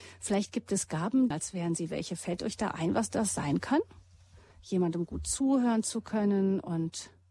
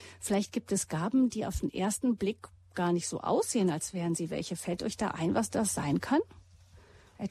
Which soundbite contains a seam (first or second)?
first